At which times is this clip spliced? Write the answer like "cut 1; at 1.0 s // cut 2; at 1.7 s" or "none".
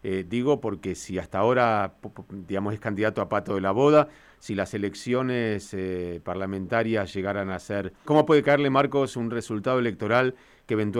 cut 1; at 8.0 s // cut 2; at 9.1 s